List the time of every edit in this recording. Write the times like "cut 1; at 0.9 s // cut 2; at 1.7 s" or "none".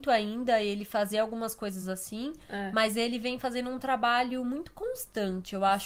none